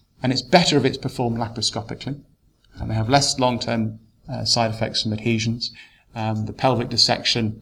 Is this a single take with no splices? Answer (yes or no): yes